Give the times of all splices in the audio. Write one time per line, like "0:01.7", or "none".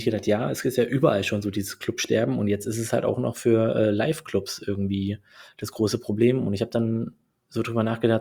none